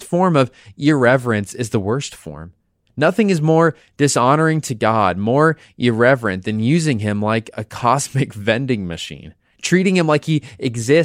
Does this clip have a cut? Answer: no; 0 cuts

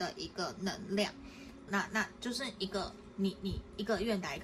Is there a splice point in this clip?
yes; 1 cut; at 1.7 s

